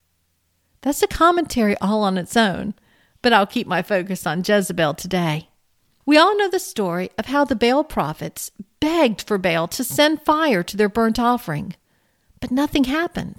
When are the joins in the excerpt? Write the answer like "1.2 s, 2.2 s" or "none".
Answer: none